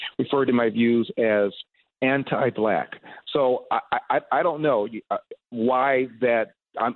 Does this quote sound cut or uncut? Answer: uncut